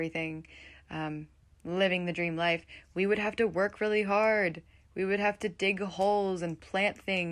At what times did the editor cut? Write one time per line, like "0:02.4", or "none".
none